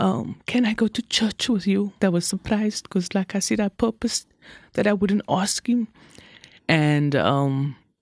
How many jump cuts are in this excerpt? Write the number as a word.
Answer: two